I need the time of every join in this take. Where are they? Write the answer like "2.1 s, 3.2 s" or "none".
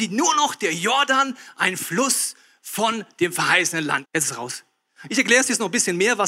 4.0 s